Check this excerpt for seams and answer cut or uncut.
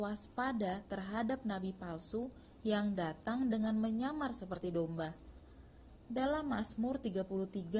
cut